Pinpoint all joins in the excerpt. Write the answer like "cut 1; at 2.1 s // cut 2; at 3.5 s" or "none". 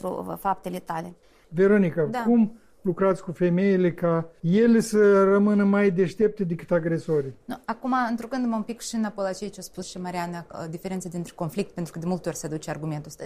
none